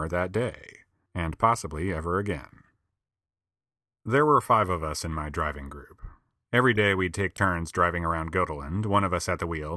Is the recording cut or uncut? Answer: uncut